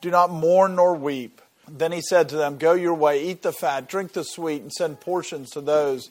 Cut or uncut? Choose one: cut